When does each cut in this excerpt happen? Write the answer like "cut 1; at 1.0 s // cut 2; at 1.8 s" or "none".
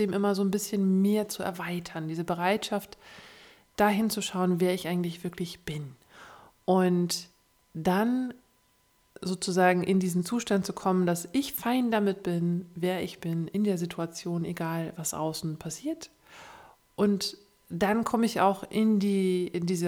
none